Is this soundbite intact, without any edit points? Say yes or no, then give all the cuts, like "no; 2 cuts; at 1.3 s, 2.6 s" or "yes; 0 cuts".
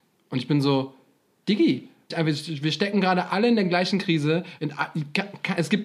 no; 2 cuts; at 2.1 s, 4.6 s